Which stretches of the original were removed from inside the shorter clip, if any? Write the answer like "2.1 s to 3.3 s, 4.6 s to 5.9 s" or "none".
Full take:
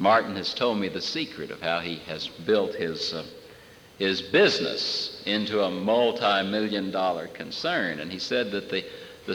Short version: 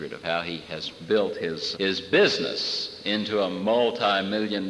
3.1 s to 3.9 s